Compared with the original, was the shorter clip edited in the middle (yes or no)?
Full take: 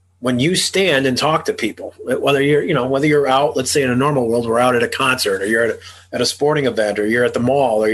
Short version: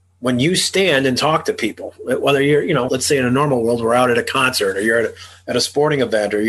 yes